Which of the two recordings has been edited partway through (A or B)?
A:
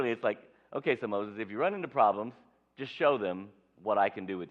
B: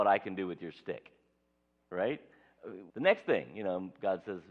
B